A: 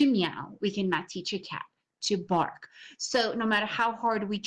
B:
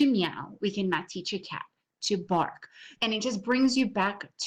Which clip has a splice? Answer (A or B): B